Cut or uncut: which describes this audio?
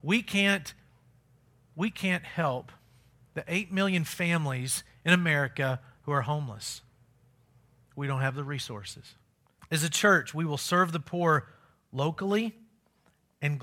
cut